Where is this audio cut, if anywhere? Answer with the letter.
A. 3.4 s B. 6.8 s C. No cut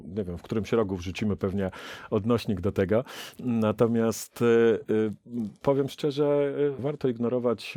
B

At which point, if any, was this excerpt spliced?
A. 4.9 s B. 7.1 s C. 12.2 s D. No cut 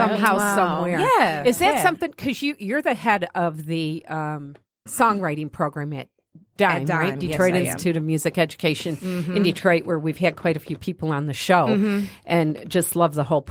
A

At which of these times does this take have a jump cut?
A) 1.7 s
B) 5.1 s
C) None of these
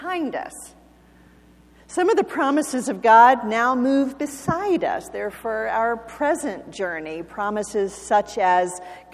C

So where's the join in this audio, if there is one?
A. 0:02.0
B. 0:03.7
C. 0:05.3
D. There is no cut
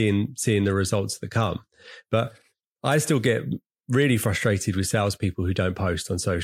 D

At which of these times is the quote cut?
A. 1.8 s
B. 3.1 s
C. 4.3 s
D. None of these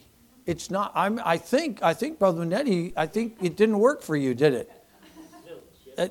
D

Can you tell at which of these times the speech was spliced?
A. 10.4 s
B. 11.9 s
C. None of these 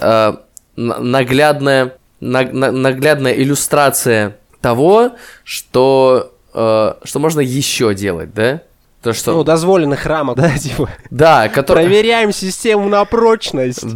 A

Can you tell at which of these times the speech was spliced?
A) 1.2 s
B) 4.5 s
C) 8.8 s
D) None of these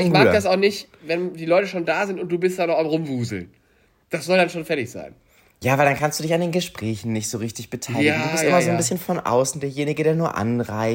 D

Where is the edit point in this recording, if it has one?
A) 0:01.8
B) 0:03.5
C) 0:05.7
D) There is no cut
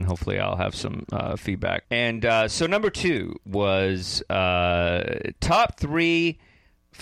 A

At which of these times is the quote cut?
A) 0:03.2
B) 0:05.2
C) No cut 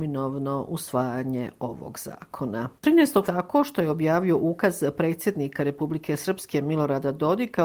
A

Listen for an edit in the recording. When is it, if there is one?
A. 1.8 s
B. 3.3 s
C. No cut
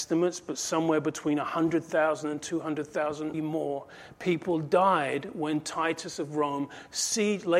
B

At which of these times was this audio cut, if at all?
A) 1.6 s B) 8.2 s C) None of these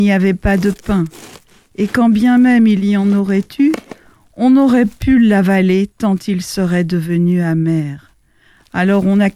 C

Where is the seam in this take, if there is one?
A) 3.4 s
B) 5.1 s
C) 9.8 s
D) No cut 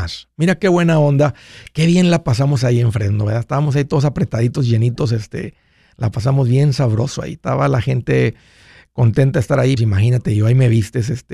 C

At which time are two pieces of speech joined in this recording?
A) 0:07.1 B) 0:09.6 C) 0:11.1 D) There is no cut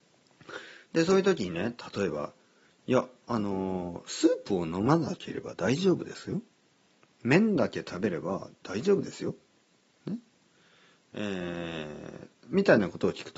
D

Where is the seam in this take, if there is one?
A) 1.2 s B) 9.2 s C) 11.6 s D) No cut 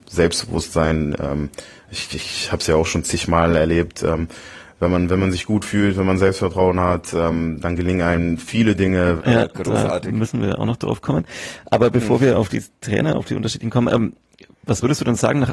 B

